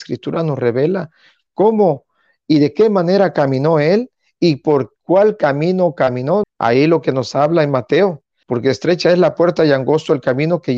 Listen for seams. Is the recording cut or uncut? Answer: cut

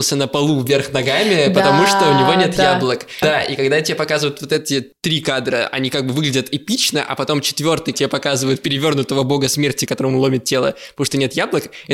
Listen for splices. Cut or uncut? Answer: cut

